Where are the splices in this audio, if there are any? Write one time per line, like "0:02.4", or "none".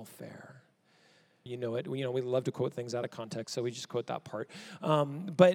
0:01.5